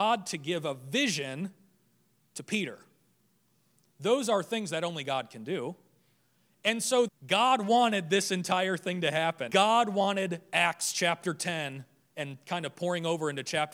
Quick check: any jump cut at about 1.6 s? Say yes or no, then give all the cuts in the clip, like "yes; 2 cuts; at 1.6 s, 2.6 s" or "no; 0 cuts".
no; 2 cuts; at 7.1 s, 9.5 s